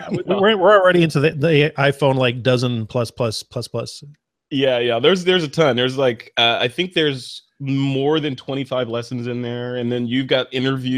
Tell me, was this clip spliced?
no; 0 cuts

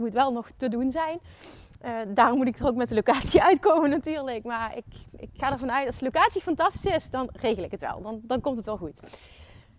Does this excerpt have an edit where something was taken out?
no; 0 cuts

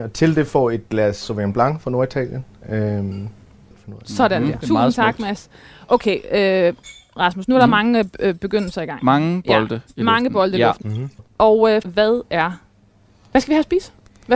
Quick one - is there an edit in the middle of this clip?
yes; 3 cuts; at 4.6 s, 10.8 s, 11.8 s

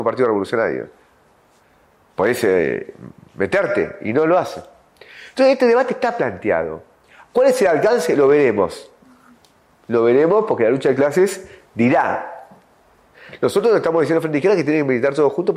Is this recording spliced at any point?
no; 0 cuts

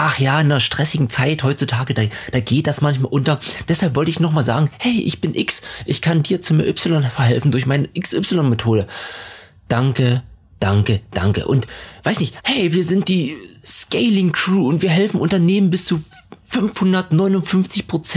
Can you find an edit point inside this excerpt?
yes; 1 cut; at 12.4 s

